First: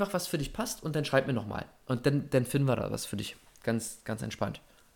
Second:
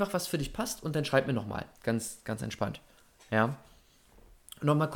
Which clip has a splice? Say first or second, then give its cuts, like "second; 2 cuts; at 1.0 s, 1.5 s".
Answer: second; 1 cut; at 1.7 s